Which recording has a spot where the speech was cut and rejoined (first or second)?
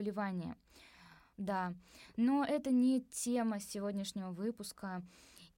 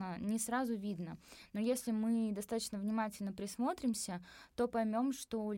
first